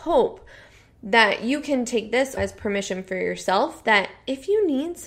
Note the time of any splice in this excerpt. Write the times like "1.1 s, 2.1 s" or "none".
2.4 s

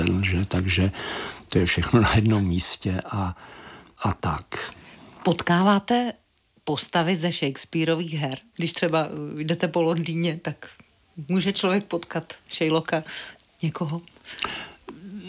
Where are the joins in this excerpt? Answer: 8.5 s

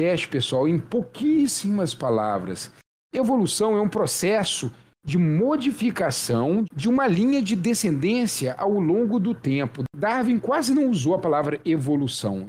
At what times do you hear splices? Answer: none

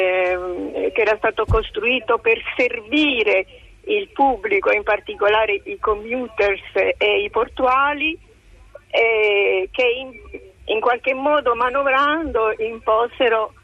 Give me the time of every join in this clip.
none

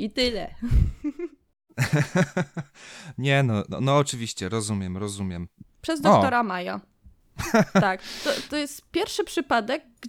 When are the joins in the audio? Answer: 5.6 s

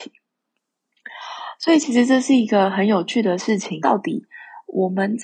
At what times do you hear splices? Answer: 3.8 s

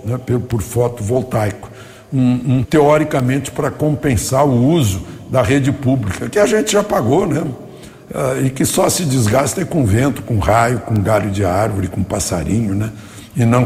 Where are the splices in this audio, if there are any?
2.6 s

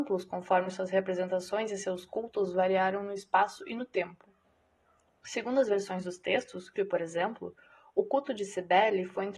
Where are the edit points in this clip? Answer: 6.8 s

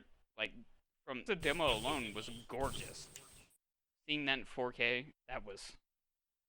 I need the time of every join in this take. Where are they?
1.3 s, 5.1 s

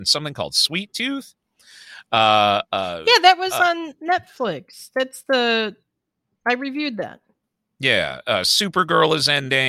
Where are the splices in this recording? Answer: none

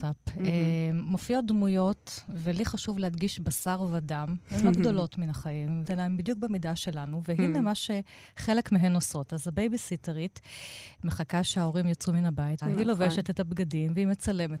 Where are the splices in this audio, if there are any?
5.8 s, 12.6 s

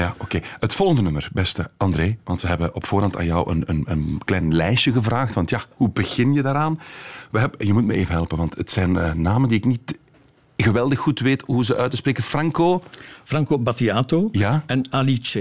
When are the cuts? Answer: none

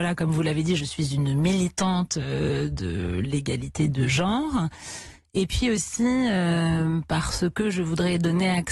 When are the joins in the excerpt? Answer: none

